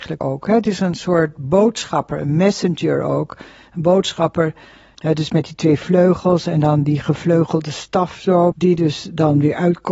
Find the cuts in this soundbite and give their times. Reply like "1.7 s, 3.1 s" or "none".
4.9 s, 8.5 s